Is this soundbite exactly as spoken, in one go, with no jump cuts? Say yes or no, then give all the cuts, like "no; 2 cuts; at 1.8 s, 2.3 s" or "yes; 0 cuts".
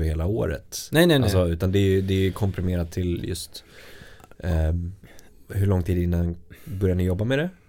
yes; 0 cuts